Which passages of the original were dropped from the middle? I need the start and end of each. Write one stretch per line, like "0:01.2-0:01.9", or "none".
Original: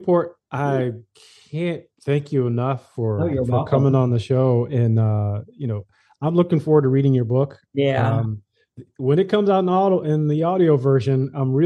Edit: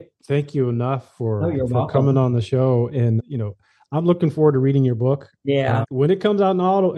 0:04.9-0:05.5
0:08.1-0:08.9